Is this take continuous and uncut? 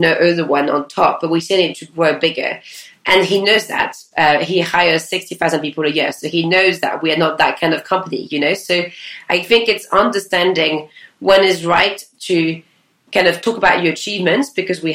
yes; 0 cuts

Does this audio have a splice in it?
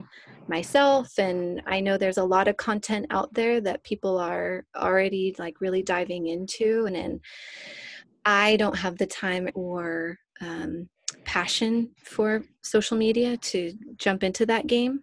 yes; 2 cuts; at 6.9 s, 9.5 s

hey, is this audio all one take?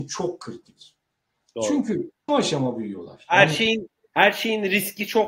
no; 1 cut; at 2.3 s

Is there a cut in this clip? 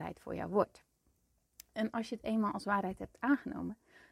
no; 0 cuts

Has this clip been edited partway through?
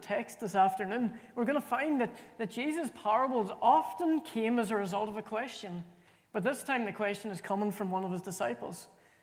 yes; 1 cut; at 6.2 s

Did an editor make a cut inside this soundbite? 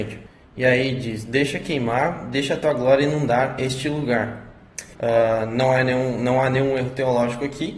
yes; 1 cut; at 4.9 s

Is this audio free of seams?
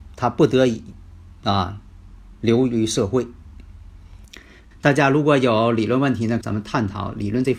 no; 2 cuts; at 4.7 s, 6.4 s

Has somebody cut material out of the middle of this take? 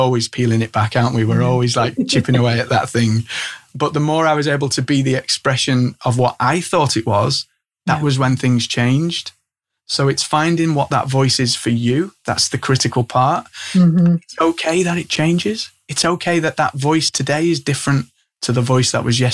yes; 1 cut; at 2.7 s

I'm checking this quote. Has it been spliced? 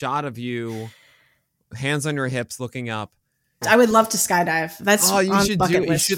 yes; 1 cut; at 3.6 s

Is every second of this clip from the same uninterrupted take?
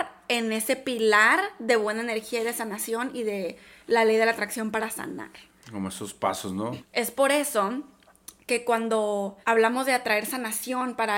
no; 2 cuts; at 6.8 s, 9.4 s

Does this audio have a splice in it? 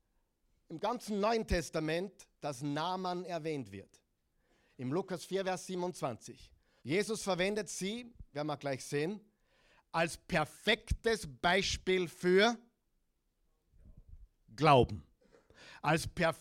yes; 2 cuts; at 6.8 s, 8.3 s

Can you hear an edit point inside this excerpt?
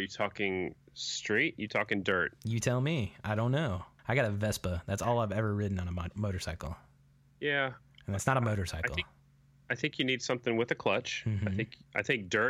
no; 0 cuts

